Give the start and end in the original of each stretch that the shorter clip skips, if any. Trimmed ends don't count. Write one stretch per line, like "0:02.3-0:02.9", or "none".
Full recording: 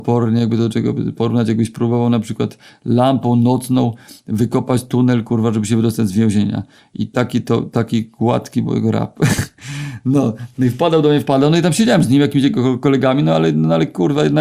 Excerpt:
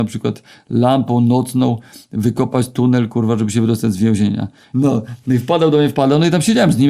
0:06.9-0:10.0